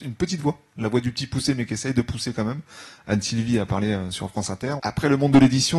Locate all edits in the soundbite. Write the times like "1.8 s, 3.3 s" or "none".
4.8 s